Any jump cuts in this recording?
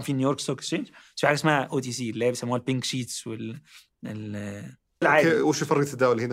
yes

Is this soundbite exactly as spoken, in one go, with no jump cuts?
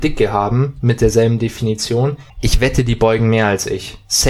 no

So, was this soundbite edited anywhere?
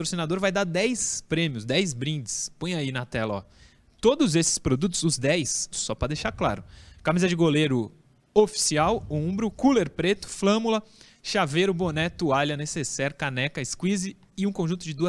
yes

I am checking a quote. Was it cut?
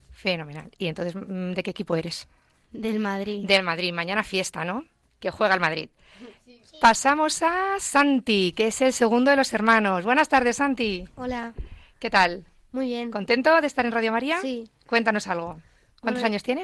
no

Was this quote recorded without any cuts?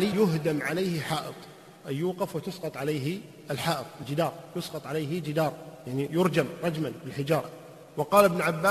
yes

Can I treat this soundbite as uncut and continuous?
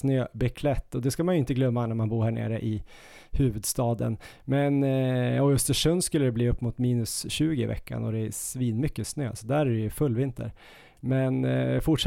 yes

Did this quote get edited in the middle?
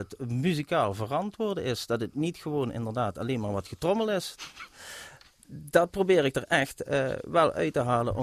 no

